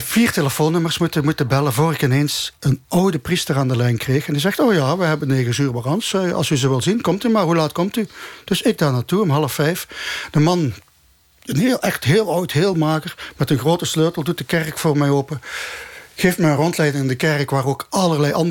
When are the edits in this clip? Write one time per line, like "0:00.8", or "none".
none